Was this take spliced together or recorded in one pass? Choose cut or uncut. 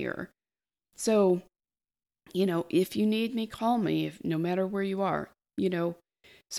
uncut